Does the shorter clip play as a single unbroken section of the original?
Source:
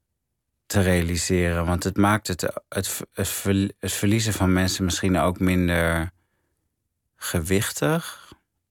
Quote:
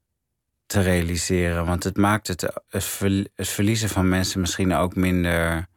no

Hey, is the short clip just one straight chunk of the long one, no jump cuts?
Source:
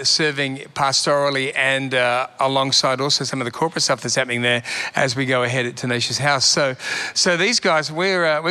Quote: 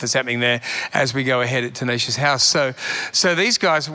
yes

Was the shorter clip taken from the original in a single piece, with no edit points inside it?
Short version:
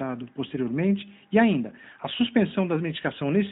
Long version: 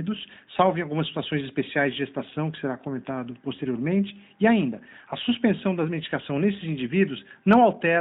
yes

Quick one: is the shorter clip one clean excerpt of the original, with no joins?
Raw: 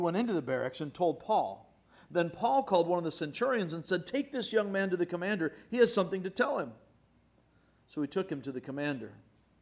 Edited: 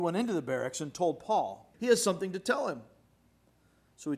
no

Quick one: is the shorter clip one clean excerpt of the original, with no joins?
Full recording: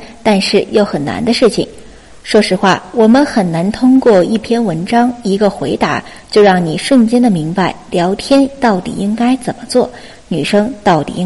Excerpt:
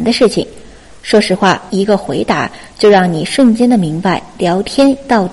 no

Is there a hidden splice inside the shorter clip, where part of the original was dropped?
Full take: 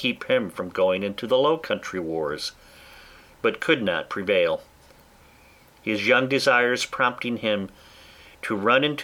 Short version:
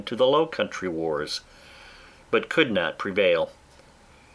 no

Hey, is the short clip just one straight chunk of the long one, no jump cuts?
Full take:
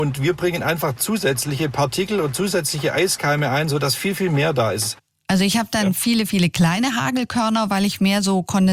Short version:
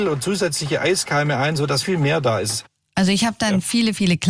no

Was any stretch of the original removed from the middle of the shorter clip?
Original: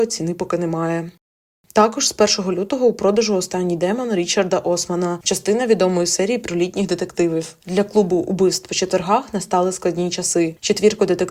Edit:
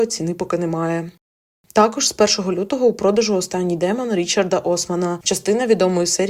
no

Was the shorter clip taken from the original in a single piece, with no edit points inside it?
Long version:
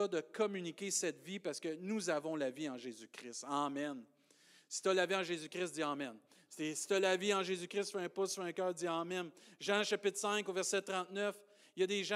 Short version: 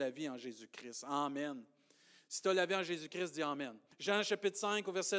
no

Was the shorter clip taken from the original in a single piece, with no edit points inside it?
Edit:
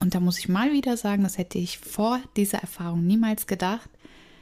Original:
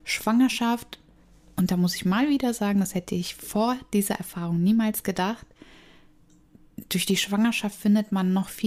yes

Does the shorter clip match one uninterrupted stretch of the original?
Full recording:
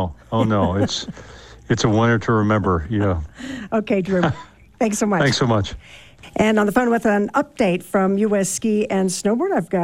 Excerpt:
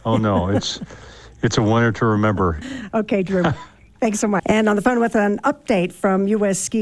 no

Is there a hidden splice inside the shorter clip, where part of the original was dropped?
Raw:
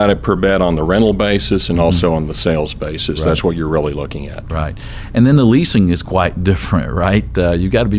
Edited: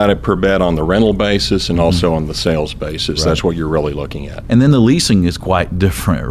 yes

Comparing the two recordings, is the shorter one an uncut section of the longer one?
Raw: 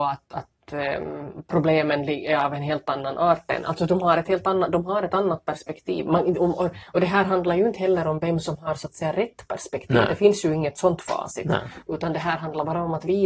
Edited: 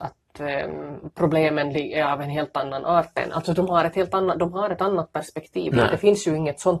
no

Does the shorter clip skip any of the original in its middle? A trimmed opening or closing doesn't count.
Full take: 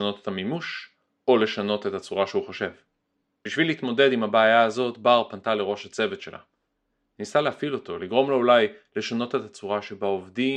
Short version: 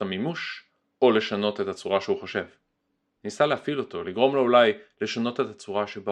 yes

